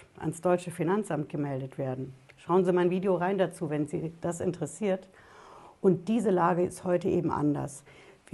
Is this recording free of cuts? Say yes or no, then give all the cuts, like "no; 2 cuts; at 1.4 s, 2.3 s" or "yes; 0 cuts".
yes; 0 cuts